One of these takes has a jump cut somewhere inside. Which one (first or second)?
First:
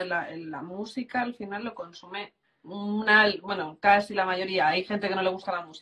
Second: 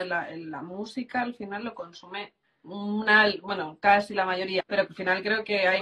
second